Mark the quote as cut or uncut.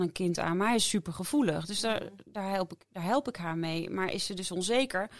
uncut